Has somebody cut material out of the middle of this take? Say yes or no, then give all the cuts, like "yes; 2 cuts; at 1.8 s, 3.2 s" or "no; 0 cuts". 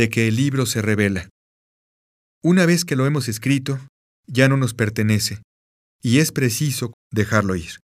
yes; 1 cut; at 6.9 s